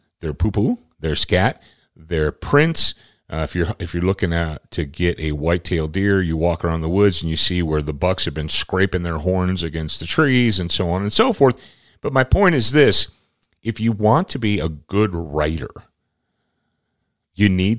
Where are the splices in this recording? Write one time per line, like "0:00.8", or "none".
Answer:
none